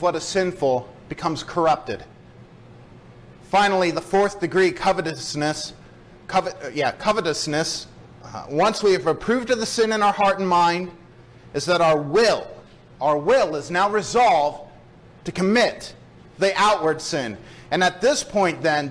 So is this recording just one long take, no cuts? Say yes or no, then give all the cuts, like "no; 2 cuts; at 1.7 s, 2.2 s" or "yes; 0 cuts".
yes; 0 cuts